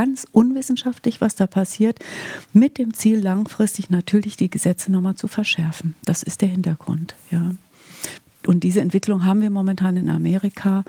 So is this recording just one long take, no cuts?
yes; 0 cuts

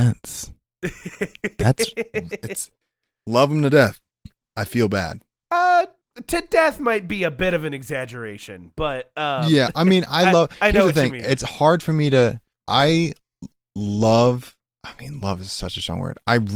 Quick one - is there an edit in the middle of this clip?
no; 0 cuts

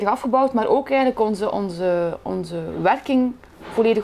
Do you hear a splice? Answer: no; 0 cuts

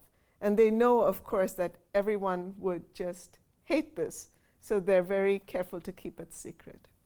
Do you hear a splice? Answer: no; 0 cuts

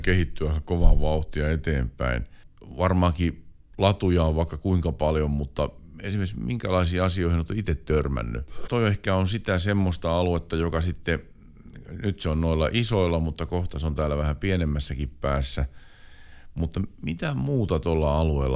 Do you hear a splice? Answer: yes; 2 cuts; at 2.5 s, 8.7 s

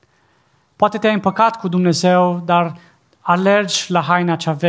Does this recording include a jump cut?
no; 0 cuts

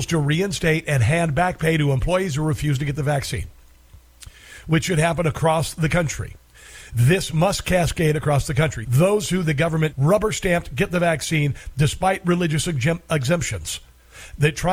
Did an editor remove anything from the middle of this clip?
yes; 2 cuts; at 8.8 s, 9.9 s

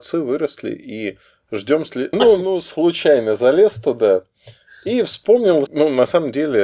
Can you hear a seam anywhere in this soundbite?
yes; 2 cuts; at 2.1 s, 5.7 s

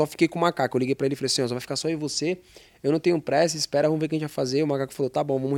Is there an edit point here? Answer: no; 0 cuts

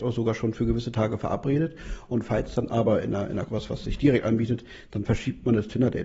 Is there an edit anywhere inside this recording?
yes; 1 cut; at 3.5 s

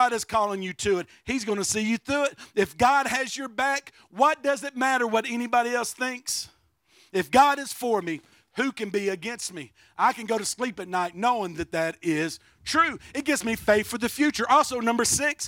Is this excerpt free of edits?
yes; 0 cuts

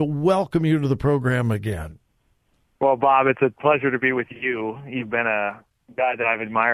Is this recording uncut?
yes; 0 cuts

